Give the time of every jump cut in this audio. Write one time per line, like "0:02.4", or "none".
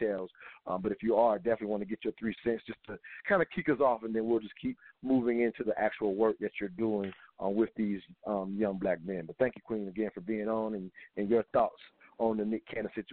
none